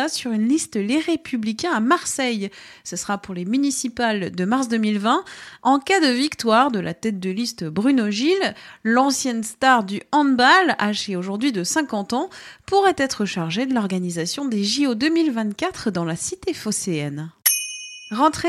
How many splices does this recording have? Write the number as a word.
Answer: one